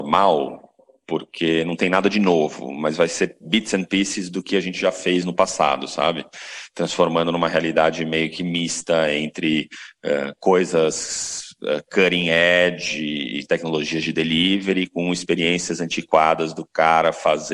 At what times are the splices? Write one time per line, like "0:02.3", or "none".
none